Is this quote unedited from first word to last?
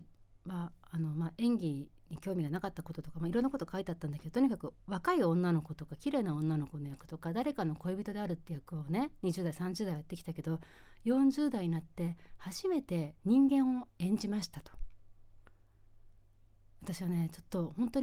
no; 1 cut; at 13.2 s

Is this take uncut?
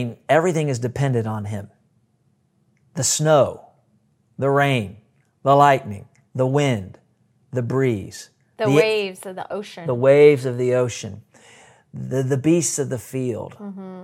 no; 1 cut; at 6.3 s

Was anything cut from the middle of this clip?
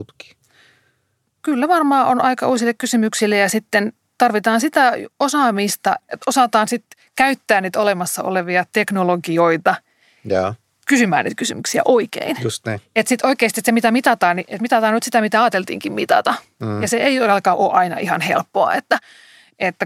yes; 1 cut; at 6.0 s

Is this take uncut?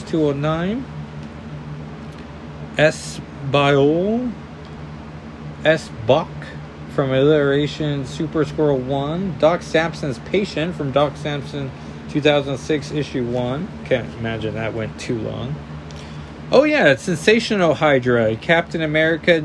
yes; 0 cuts

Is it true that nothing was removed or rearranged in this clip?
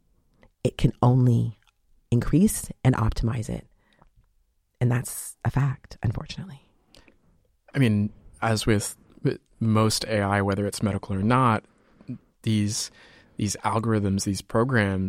yes; 0 cuts

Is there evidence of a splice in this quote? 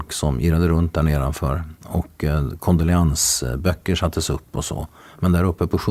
no; 0 cuts

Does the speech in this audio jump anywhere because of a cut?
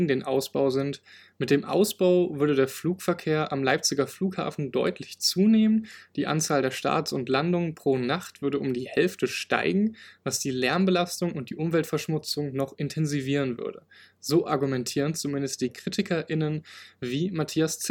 no; 0 cuts

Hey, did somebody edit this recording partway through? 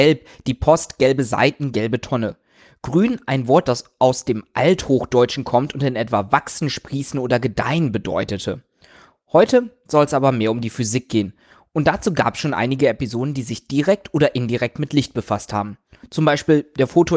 no; 0 cuts

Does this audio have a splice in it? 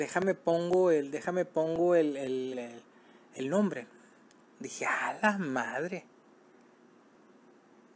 yes; 2 cuts; at 2.5 s, 4.5 s

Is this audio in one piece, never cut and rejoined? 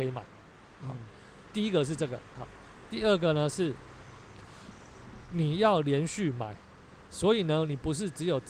yes; 0 cuts

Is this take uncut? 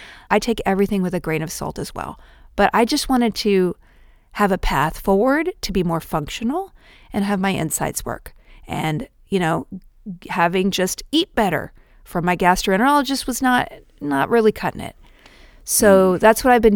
yes; 0 cuts

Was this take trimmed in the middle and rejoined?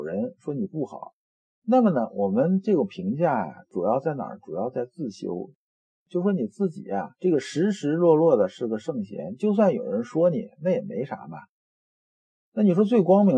no; 0 cuts

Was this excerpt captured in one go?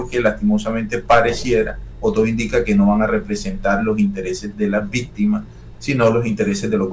yes; 0 cuts

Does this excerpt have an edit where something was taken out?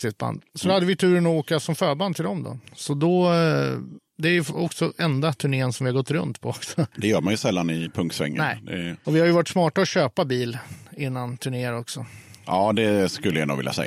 yes; 1 cut; at 12.4 s

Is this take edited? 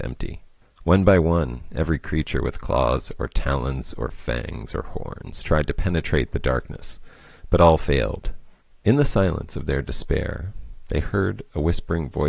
no; 0 cuts

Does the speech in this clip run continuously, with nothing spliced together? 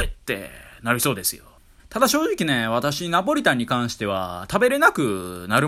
no; 1 cut; at 1.8 s

